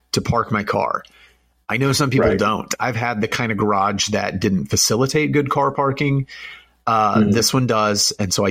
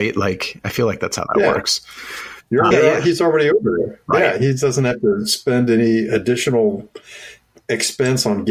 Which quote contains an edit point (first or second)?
second